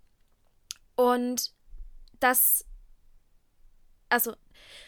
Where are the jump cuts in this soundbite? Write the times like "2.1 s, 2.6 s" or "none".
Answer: 2.1 s